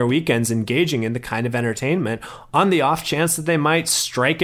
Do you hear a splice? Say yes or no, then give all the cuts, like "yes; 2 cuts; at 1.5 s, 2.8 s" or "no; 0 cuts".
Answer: no; 0 cuts